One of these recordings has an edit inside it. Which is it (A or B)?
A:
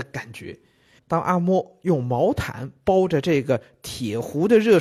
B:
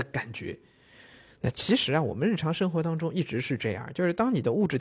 A